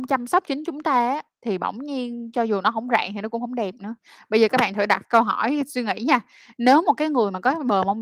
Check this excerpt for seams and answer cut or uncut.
uncut